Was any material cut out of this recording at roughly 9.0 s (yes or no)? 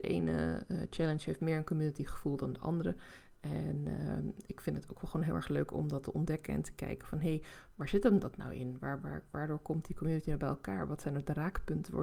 yes